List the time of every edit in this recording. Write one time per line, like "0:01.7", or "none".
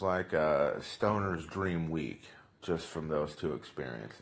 none